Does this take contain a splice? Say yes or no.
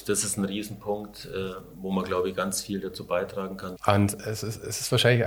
yes